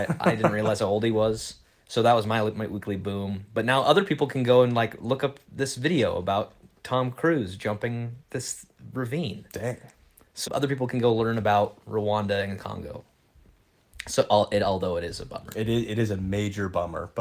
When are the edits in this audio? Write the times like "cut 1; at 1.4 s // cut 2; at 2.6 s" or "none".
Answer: cut 1; at 8.2 s // cut 2; at 10.4 s